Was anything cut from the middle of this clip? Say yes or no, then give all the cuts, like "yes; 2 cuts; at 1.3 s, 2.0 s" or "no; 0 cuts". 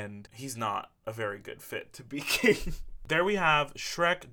yes; 2 cuts; at 1.0 s, 3.1 s